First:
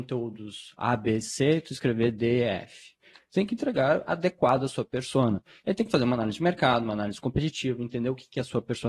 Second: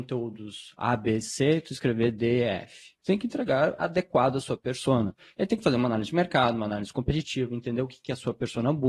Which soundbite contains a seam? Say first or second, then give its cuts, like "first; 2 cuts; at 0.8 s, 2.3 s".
second; 1 cut; at 3.0 s